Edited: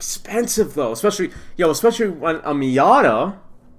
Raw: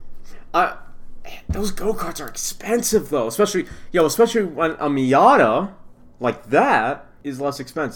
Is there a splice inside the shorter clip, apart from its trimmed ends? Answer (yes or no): no